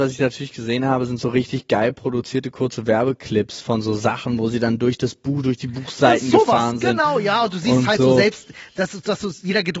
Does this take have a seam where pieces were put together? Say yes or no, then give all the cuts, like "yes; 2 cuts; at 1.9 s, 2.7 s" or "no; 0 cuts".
no; 0 cuts